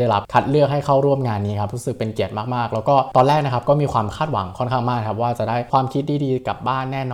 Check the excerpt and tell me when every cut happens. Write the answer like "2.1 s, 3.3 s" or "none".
none